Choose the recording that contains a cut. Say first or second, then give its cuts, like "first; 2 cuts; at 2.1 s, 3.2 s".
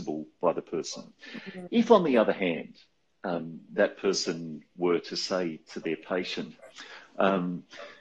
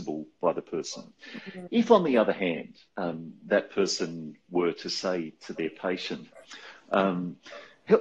second; 1 cut; at 2.9 s